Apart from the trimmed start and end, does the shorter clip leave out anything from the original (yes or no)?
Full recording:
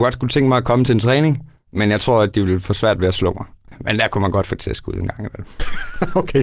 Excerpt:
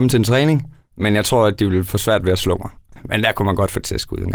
no